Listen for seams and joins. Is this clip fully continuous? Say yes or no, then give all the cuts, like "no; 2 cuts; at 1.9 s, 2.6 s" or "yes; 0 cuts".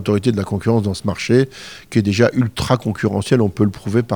yes; 0 cuts